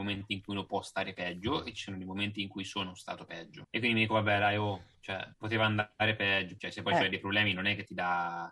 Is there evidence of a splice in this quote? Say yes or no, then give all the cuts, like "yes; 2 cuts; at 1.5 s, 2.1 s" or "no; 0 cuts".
yes; 2 cuts; at 5.3 s, 6.6 s